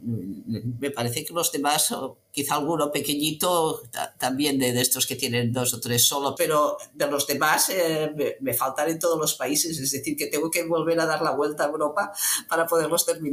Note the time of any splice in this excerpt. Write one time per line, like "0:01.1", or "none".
0:06.4

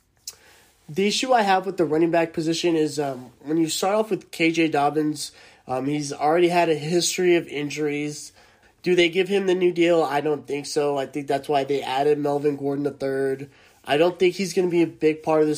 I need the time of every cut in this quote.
0:08.6

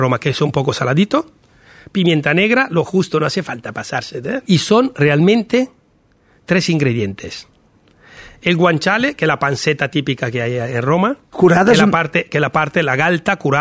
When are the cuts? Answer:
0:04.5

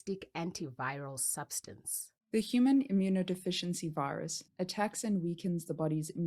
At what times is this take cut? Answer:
0:04.5

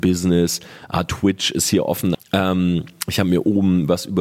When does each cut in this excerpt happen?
0:02.1

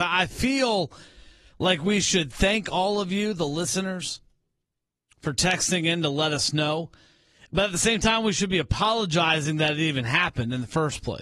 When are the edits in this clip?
none

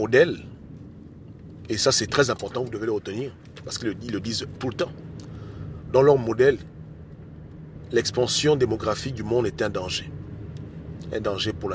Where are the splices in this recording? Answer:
none

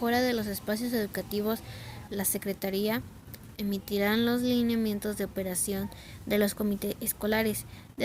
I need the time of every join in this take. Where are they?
0:02.1
0:03.6

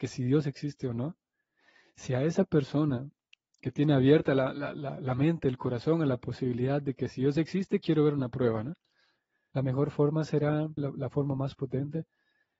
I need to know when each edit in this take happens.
0:09.5
0:10.8

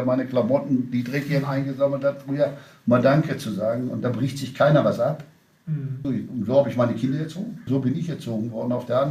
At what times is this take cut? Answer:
0:06.0
0:07.7

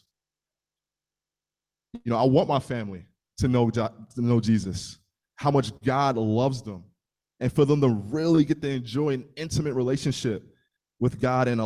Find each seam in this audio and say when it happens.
none

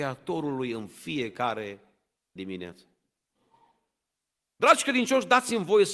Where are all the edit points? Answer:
none

